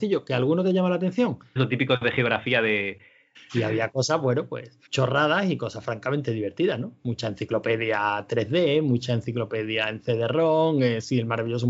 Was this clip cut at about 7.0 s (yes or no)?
no